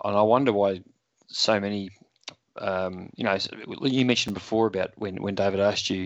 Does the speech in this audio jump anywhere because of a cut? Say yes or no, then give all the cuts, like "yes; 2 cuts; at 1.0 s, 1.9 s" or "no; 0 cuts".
no; 0 cuts